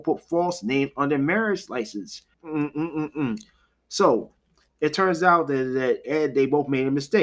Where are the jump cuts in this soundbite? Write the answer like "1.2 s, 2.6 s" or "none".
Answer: 2.3 s